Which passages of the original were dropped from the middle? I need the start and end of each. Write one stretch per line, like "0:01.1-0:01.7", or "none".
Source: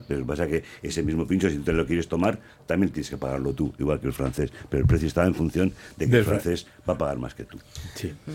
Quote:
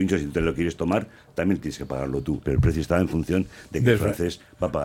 0:03.8-0:04.7

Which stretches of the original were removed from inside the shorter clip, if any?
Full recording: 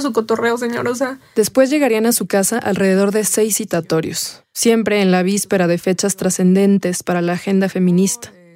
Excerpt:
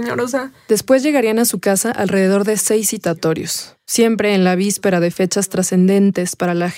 none

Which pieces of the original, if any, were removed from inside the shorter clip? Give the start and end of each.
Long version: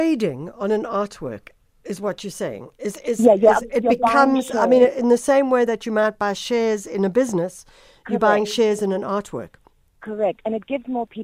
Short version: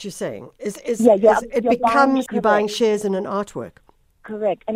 0:04.5-0:08.0

